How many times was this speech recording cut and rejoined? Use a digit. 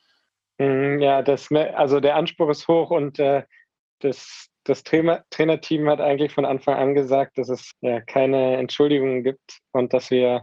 1